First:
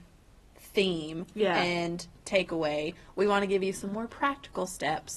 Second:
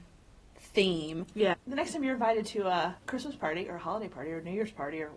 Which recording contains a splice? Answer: second; 2 cuts; at 1.5 s, 3.0 s

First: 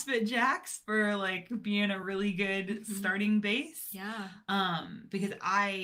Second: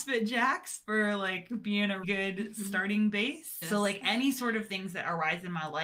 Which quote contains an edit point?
second; 2 cuts; at 2.0 s, 3.6 s

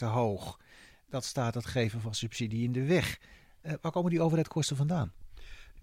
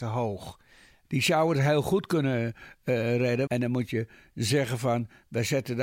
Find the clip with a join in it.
second; 2 cuts; at 1.0 s, 3.5 s

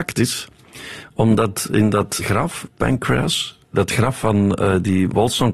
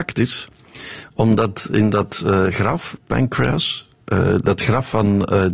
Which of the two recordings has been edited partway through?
first; 2 cuts; at 2.2 s, 3.7 s

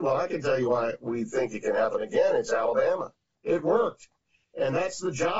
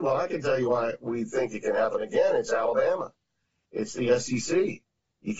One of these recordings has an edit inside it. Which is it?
first; 1 cut; at 3.3 s

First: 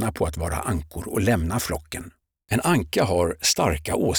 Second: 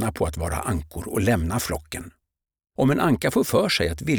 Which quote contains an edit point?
first; 1 cut; at 2.4 s

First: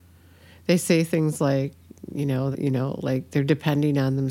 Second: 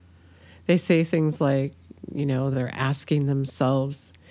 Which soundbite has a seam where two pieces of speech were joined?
first; 1 cut; at 2.5 s

